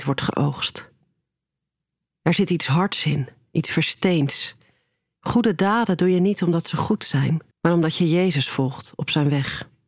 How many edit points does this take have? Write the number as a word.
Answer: two